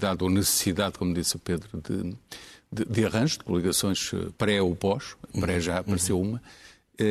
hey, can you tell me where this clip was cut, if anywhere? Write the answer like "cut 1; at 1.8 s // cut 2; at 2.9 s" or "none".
cut 1; at 4.4 s